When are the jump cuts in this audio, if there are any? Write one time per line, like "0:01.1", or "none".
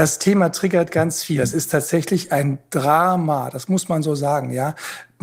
none